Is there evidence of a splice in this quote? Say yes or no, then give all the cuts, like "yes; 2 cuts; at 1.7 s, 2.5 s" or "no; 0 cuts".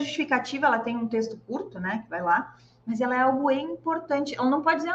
no; 0 cuts